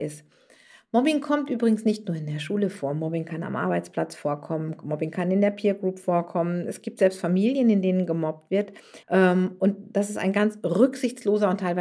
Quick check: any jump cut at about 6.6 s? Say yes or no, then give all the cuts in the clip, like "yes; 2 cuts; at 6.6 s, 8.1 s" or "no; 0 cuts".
no; 1 cut; at 9.0 s